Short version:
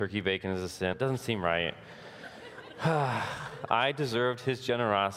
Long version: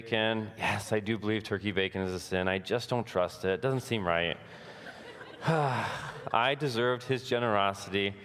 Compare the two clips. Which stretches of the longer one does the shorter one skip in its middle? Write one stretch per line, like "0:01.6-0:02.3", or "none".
0:02.4-0:03.6